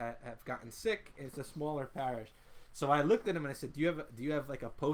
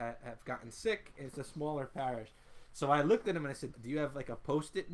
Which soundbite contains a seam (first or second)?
second